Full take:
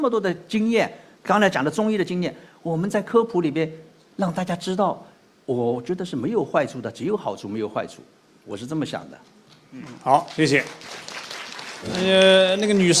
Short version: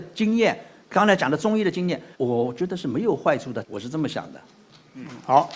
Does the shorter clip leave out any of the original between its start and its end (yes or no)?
yes